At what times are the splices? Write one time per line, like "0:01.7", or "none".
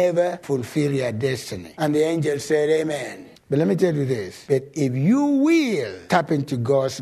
none